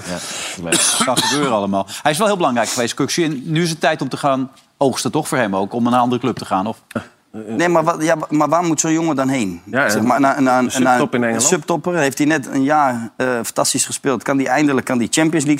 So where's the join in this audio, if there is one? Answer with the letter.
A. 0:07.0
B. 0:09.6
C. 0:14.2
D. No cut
A